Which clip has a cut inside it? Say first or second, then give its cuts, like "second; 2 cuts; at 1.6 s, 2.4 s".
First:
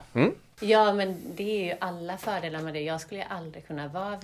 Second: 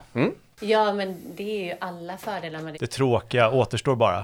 second; 1 cut; at 2.7 s